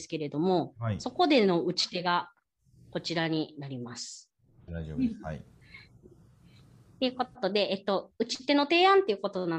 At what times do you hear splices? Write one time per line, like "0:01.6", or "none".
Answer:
0:04.7